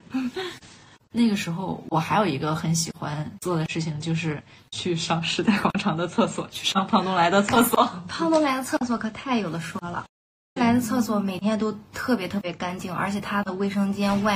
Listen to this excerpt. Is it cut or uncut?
cut